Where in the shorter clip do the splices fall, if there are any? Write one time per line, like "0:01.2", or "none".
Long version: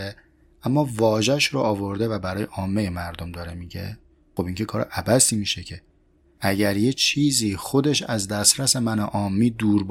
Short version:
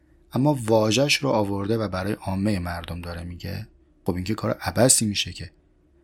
none